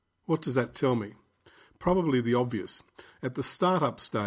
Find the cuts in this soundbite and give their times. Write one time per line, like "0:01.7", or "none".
none